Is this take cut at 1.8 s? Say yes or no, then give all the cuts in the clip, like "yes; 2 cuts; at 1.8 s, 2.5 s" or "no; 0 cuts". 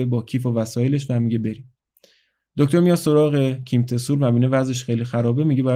no; 0 cuts